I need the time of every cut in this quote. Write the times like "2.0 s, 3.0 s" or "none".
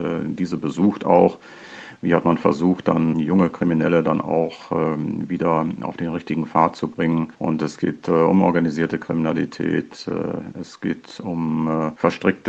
3.1 s